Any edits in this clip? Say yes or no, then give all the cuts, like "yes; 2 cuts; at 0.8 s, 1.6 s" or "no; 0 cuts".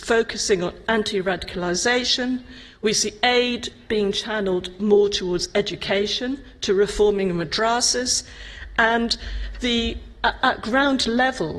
yes; 1 cut; at 10.4 s